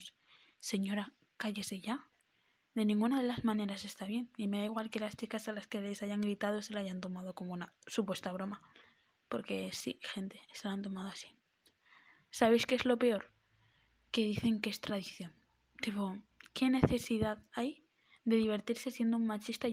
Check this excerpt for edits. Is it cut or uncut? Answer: uncut